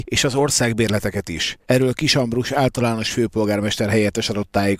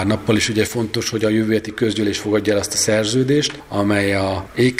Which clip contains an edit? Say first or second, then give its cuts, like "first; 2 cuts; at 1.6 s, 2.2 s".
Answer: first; 1 cut; at 1.6 s